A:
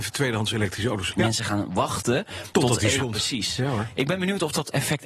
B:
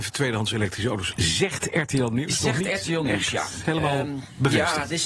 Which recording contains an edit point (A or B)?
A